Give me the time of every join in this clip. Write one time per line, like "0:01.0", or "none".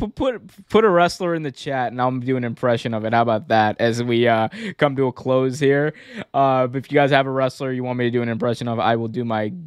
none